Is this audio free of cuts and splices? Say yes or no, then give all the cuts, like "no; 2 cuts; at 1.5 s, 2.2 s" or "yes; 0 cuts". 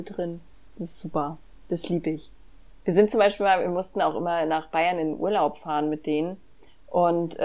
yes; 0 cuts